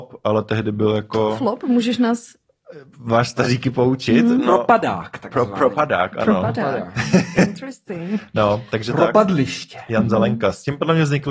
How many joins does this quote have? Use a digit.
0